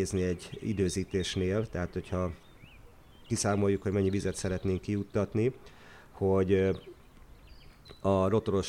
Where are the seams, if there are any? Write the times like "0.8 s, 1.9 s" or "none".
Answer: none